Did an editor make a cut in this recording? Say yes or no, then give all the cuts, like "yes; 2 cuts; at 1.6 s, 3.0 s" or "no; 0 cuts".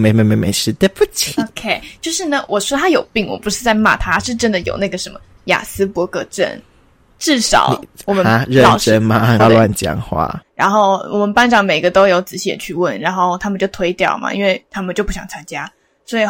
yes; 2 cuts; at 9.4 s, 10.4 s